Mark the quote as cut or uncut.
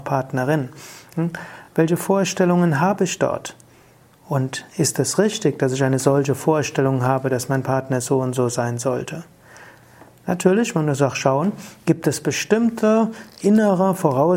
uncut